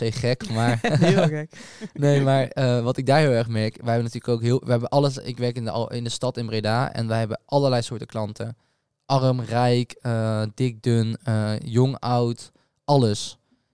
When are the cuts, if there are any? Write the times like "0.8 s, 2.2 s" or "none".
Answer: none

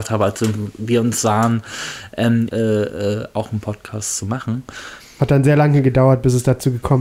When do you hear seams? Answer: 2.5 s, 5.0 s

